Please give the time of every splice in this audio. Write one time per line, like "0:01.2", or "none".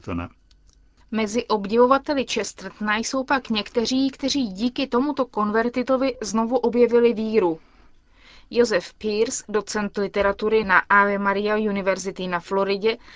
0:01.0